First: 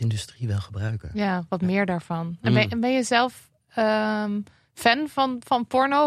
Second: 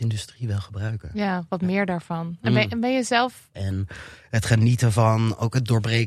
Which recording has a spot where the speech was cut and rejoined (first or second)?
second